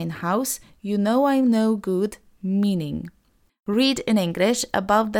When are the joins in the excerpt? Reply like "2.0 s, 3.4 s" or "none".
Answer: 3.5 s